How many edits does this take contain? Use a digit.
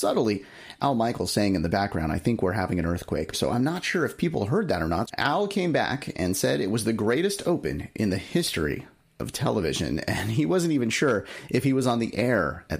2